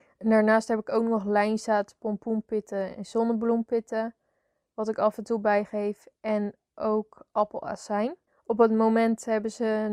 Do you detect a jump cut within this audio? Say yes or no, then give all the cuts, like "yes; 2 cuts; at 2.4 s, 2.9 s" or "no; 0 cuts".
no; 0 cuts